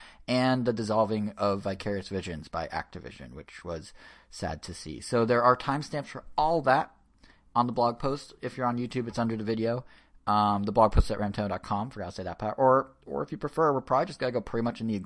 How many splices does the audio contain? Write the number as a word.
zero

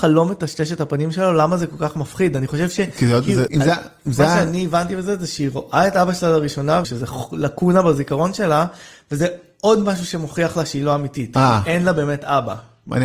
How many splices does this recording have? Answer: two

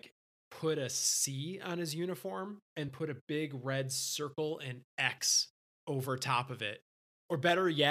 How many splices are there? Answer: one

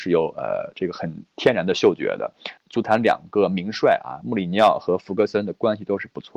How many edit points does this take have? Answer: one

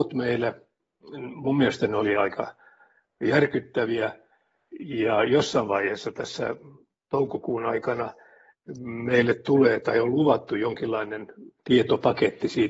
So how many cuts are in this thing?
zero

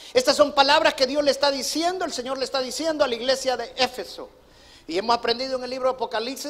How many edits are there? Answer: zero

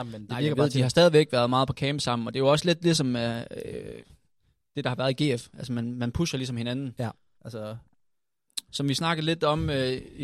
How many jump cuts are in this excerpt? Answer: two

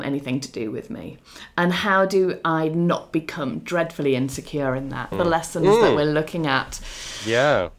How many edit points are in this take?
one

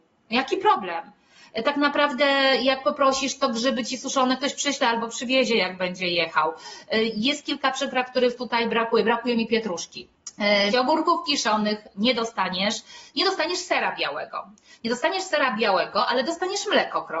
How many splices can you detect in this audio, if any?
one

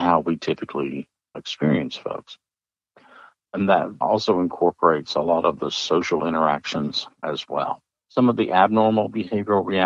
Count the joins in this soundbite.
one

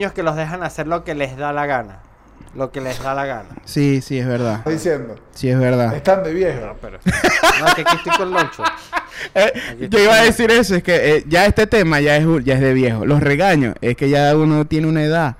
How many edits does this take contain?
one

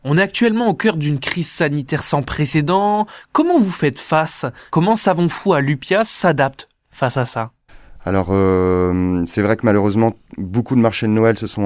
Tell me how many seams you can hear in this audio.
zero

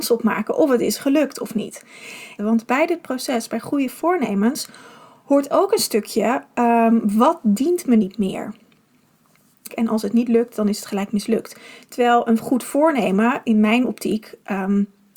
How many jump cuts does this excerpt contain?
two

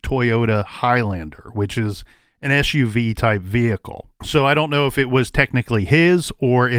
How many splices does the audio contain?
one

